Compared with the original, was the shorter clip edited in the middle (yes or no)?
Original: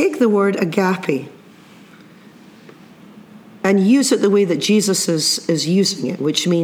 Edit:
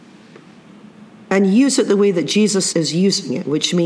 yes